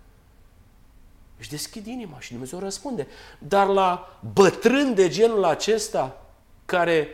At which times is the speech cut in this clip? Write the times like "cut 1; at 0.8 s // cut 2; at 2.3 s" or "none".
none